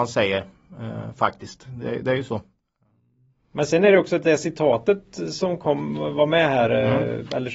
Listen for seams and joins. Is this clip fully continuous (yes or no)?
yes